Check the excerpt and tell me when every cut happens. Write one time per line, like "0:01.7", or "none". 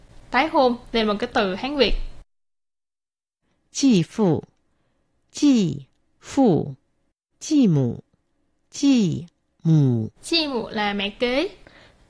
0:07.3
0:10.2